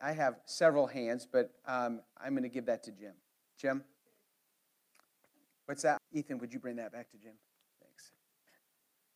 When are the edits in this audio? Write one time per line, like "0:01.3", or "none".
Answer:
0:06.0